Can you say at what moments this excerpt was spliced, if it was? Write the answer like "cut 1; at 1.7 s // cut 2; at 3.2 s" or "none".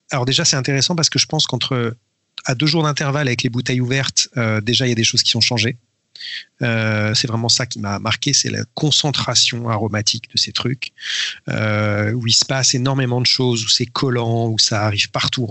cut 1; at 7.1 s